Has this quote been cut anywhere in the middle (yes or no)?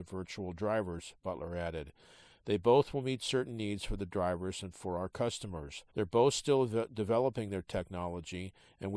yes